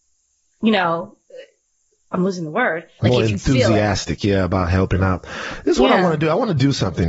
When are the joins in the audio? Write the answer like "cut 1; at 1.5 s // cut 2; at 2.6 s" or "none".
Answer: cut 1; at 3.0 s